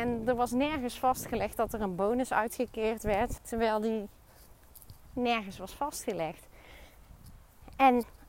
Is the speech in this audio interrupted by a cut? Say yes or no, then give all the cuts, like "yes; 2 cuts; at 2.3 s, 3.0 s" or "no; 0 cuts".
yes; 1 cut; at 3.4 s